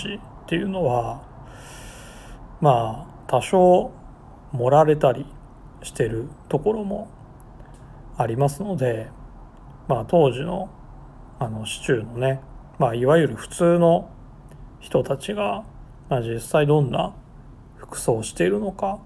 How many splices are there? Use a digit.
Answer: 0